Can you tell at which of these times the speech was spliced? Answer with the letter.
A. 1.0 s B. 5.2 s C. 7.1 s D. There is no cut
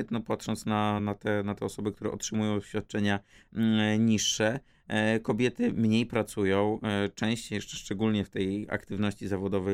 A